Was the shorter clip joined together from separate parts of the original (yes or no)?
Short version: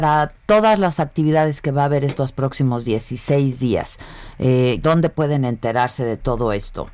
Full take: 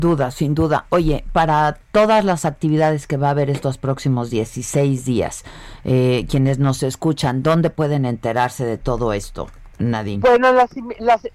yes